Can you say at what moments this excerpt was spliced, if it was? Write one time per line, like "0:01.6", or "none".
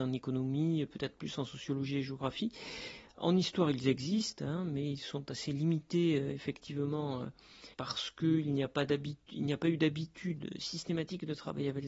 0:07.7
0:10.4